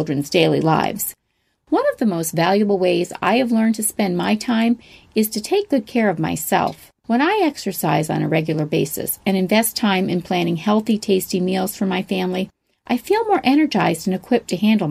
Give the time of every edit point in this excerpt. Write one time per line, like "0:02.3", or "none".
0:07.0